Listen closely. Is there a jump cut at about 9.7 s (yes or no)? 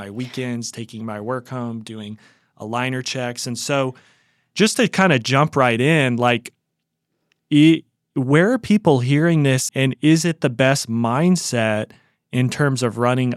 yes